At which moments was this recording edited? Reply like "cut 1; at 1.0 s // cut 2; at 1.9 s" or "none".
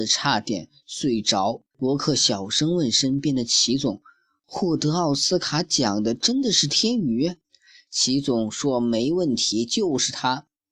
cut 1; at 1.7 s // cut 2; at 7.4 s